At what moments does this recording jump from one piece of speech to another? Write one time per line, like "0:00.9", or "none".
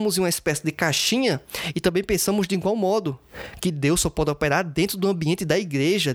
none